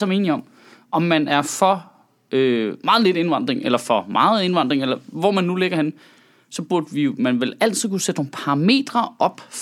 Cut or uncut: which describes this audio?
uncut